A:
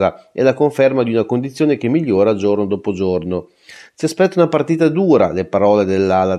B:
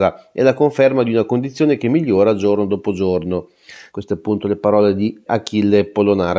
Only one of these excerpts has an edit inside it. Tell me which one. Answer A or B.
B